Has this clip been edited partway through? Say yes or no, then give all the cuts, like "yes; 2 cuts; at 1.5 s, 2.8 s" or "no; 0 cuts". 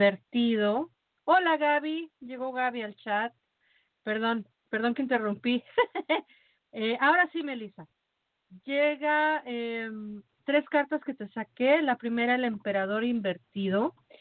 no; 0 cuts